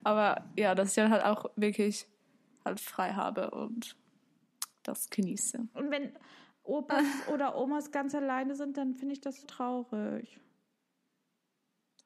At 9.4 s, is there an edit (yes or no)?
yes